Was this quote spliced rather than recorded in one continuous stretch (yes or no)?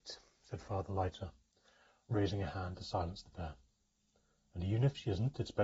no